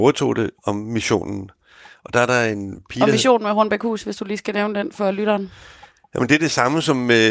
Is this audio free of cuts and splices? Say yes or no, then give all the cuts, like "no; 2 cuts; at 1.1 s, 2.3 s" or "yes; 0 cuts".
yes; 0 cuts